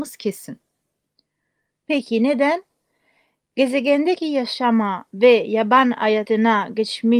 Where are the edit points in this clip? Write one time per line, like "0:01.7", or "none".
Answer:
0:01.7